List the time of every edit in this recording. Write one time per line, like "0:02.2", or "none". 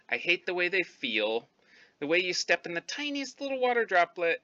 none